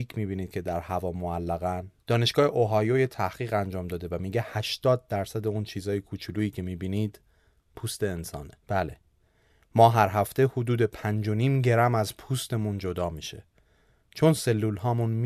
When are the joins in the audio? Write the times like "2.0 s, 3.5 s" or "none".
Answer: 2.0 s, 8.6 s